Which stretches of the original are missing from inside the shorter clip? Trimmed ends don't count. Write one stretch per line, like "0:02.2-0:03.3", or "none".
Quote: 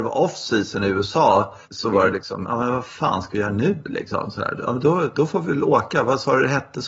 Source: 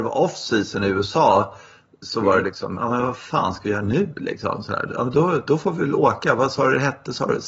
0:01.6-0:01.9